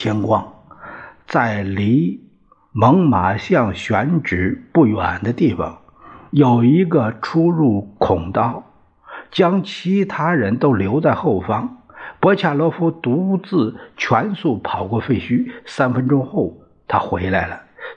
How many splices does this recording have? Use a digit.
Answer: 0